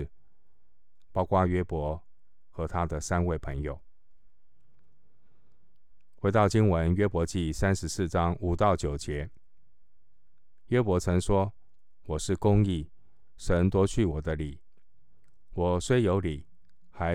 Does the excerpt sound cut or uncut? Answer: uncut